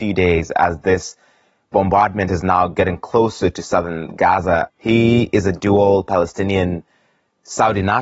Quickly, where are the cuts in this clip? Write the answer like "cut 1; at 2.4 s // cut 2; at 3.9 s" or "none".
cut 1; at 4.7 s